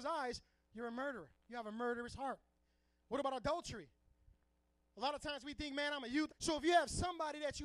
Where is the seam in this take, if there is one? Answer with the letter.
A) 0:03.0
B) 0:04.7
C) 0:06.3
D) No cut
C